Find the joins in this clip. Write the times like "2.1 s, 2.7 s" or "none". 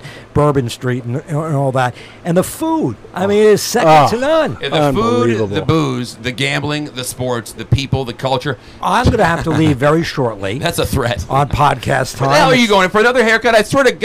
8.8 s